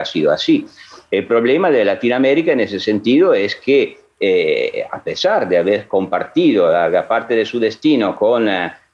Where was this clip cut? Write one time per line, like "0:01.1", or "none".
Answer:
none